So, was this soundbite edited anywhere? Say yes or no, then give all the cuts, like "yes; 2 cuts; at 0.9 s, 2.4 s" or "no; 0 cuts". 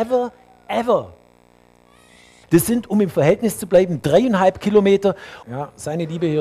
yes; 2 cuts; at 2.4 s, 5.4 s